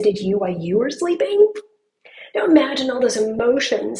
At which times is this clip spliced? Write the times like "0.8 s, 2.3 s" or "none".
none